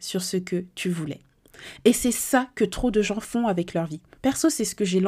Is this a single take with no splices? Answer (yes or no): yes